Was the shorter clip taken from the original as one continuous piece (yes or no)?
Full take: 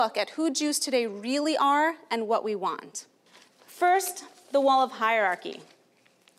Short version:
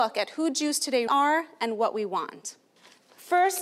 no